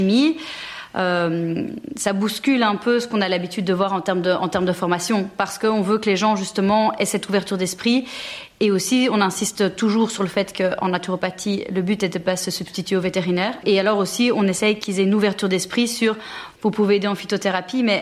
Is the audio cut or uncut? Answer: cut